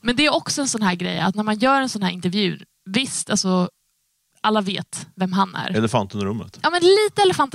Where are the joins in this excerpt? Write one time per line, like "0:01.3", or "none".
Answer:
none